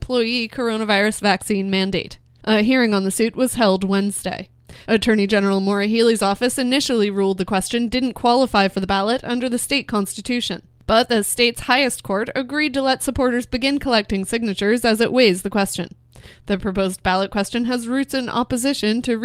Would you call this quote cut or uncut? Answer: cut